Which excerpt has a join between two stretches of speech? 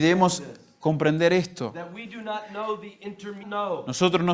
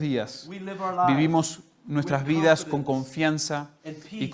first; 1 cut; at 3.4 s

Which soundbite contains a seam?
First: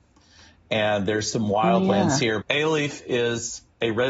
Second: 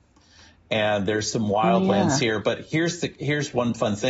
first; 1 cut; at 2.4 s

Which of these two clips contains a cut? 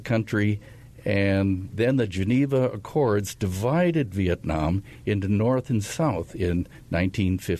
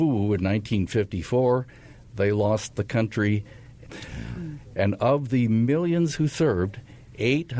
second; 1 cut; at 3.9 s

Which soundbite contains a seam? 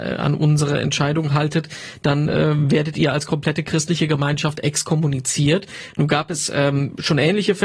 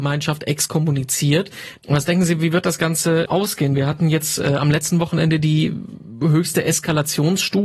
second; 2 cuts; at 1.8 s, 3.3 s

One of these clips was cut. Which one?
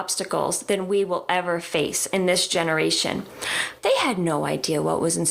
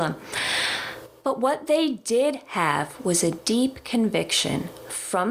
first; 1 cut; at 3.8 s

